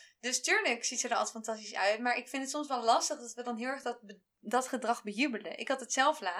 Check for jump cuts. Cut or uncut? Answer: uncut